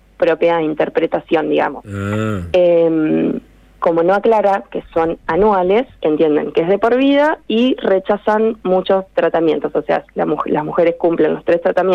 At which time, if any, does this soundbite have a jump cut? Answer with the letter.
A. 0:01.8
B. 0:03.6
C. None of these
C